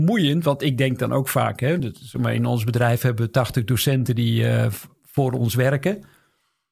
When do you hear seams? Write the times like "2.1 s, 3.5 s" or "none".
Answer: none